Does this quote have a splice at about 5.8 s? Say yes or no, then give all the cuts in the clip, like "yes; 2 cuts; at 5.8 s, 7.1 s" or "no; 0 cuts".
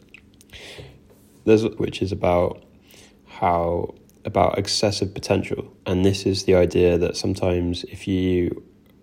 yes; 2 cuts; at 1.8 s, 5.8 s